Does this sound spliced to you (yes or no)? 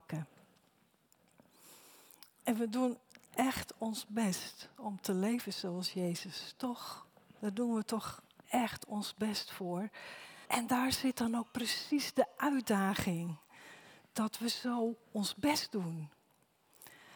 yes